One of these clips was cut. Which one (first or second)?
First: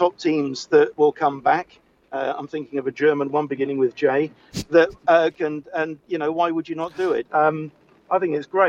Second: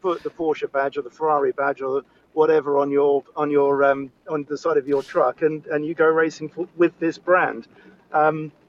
first